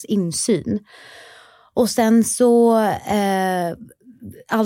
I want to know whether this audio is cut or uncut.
uncut